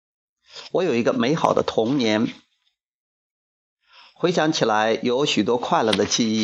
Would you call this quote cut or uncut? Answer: uncut